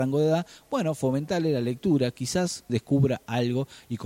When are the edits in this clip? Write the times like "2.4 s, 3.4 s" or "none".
2.7 s